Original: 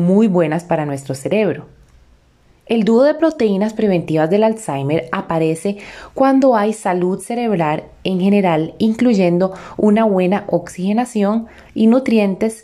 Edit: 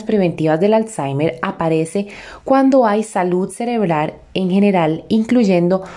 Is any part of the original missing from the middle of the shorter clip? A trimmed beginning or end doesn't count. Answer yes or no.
no